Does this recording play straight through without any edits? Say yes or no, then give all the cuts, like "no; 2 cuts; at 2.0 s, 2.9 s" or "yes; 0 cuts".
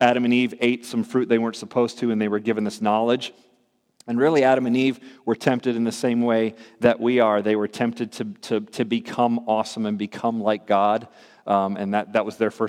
yes; 0 cuts